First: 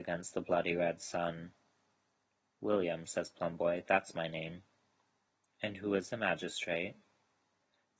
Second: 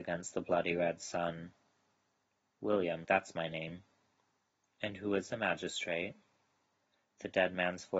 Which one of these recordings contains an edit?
second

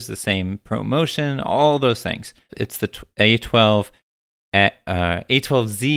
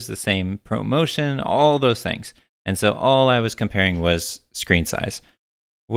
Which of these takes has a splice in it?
first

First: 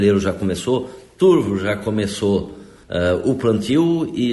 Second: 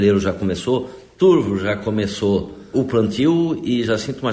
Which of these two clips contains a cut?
second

